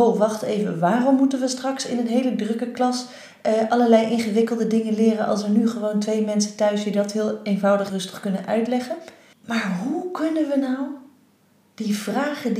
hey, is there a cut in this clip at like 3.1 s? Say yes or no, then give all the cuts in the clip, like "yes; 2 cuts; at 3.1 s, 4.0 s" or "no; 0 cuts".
no; 2 cuts; at 7.9 s, 9.3 s